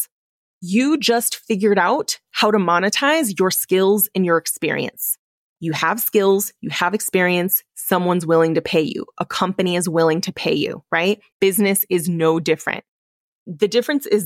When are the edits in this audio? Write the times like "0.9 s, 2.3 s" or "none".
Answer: 5.6 s, 11.3 s